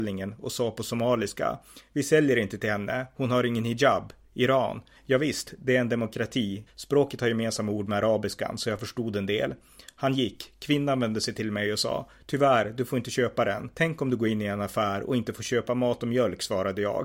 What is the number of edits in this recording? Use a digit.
3